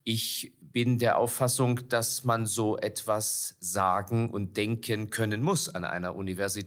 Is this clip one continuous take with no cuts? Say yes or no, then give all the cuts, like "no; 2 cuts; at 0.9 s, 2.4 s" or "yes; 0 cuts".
yes; 0 cuts